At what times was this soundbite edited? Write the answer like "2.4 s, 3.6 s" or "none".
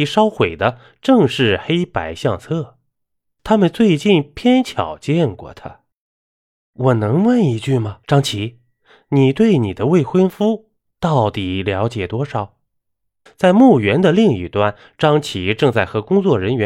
8.0 s, 13.3 s